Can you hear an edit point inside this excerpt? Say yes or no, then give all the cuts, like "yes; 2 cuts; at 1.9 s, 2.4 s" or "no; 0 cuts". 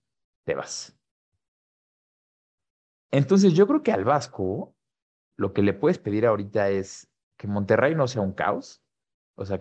no; 0 cuts